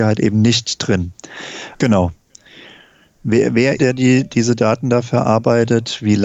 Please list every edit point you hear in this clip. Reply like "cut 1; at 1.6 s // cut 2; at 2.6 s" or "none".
cut 1; at 1.7 s // cut 2; at 3.8 s